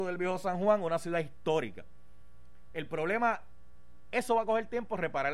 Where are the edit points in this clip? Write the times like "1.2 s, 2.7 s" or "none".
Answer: none